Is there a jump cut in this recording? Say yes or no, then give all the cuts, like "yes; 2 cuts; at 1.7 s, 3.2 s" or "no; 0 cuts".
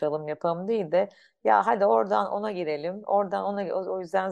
no; 0 cuts